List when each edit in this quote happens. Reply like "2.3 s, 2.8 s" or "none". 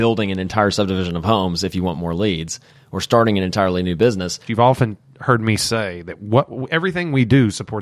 4.5 s